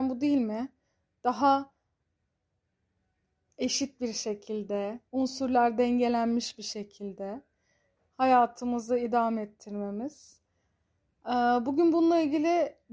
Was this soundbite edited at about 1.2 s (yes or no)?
no